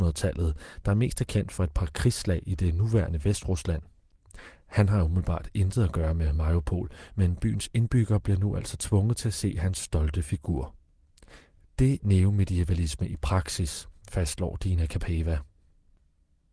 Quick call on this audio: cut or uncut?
cut